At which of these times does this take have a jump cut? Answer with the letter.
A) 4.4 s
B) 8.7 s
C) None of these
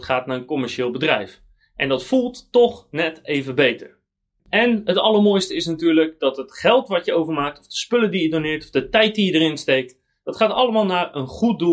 A